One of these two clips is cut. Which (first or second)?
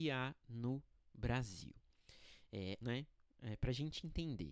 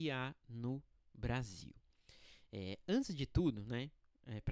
first